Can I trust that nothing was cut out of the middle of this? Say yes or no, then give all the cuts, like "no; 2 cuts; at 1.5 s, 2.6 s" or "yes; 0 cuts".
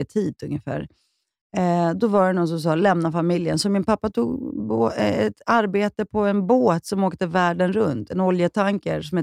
yes; 0 cuts